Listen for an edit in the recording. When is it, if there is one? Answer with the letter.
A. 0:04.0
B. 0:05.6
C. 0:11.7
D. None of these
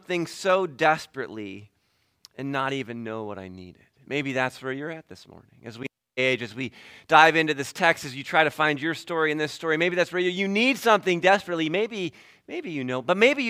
D